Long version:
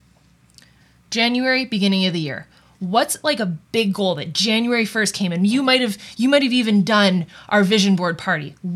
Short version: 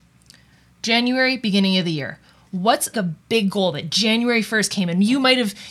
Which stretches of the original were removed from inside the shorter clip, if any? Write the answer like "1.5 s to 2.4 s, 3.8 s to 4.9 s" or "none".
3.2 s to 3.4 s